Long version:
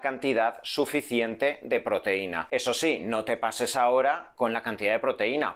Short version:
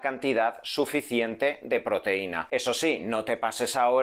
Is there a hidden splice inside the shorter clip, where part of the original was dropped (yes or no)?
no